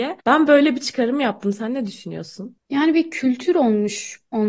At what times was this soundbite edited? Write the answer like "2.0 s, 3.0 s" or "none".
none